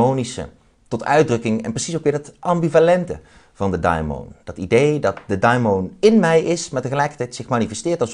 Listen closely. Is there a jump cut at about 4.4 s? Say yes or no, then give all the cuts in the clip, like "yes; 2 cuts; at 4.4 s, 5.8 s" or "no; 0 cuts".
no; 0 cuts